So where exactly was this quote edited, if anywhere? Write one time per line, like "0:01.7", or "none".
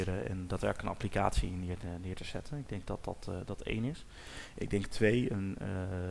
none